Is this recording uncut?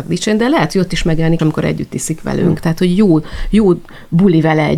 no; 1 cut; at 1.4 s

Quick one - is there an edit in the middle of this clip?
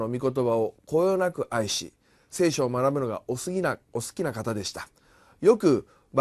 no; 0 cuts

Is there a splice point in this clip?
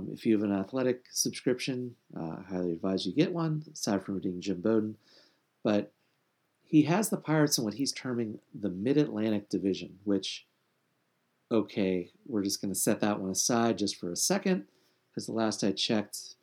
no; 0 cuts

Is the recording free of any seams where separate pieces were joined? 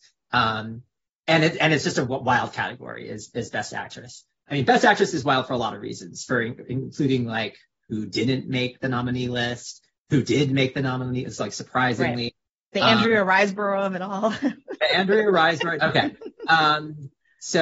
no; 2 cuts; at 4.5 s, 15.8 s

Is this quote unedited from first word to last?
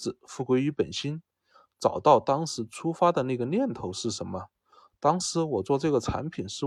yes; 0 cuts

